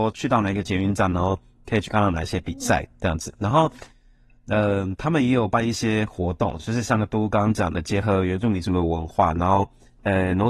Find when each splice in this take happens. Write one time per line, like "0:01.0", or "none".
none